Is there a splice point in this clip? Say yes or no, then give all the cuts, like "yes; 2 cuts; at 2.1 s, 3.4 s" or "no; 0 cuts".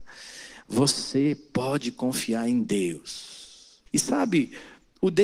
yes; 1 cut; at 3.9 s